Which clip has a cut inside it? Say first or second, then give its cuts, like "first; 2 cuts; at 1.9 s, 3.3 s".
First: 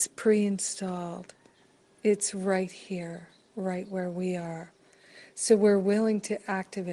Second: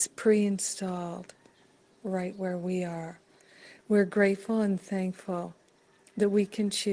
second; 2 cuts; at 1.9 s, 3.8 s